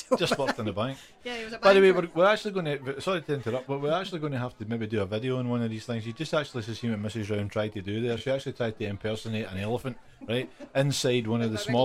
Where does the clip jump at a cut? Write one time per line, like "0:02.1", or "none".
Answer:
none